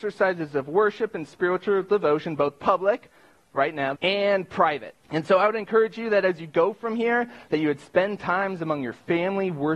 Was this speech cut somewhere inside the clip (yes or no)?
yes